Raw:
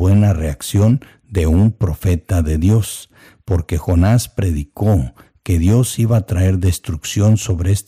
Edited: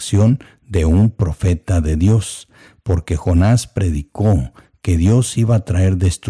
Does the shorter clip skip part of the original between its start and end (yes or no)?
no